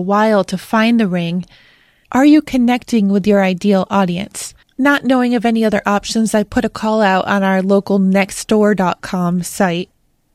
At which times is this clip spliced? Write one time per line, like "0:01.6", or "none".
0:02.0
0:04.6